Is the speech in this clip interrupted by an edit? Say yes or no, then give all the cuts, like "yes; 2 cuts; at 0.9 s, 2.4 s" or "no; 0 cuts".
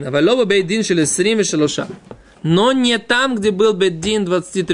yes; 1 cut; at 2.3 s